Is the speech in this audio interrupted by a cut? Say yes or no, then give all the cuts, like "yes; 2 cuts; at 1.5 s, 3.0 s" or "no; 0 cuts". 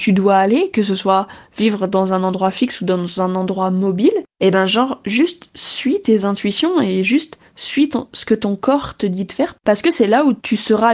no; 0 cuts